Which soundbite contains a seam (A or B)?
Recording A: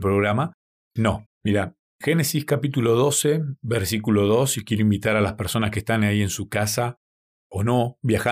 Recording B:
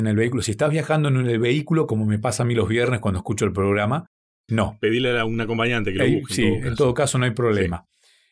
A